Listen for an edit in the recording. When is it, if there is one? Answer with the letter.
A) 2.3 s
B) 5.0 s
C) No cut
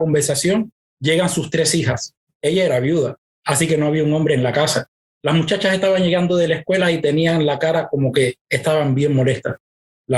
C